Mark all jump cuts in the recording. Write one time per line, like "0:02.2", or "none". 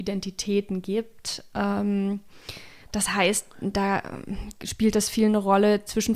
none